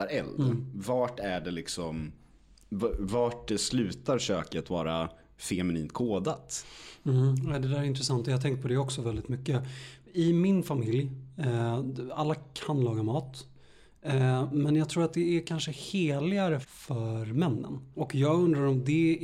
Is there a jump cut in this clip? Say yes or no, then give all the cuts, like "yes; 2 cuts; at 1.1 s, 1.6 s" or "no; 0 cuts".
yes; 2 cuts; at 16.6 s, 17.9 s